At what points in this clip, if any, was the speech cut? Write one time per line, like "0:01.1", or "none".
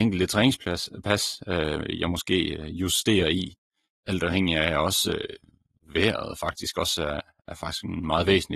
none